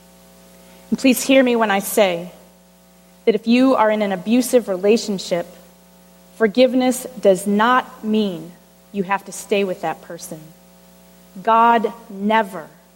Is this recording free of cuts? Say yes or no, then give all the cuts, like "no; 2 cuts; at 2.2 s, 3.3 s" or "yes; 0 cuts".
yes; 0 cuts